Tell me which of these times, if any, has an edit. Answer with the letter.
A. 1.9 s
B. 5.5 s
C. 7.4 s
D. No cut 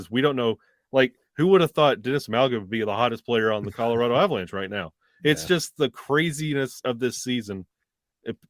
D